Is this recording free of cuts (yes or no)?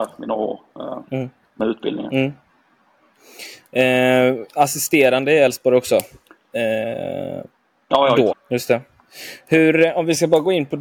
no